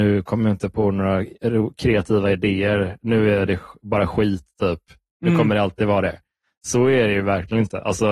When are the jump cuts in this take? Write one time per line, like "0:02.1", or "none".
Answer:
none